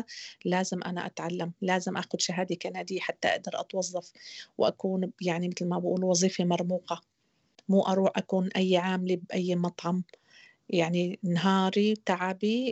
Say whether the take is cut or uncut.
uncut